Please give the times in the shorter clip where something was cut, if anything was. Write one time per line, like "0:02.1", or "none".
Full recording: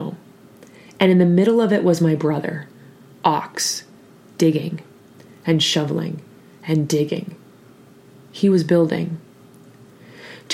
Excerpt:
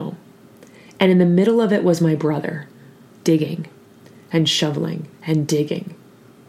0:03.1
0:05.1